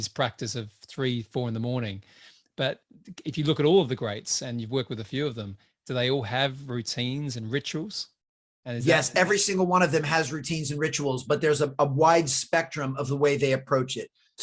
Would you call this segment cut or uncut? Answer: uncut